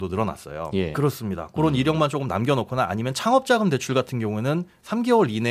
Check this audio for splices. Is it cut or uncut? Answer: cut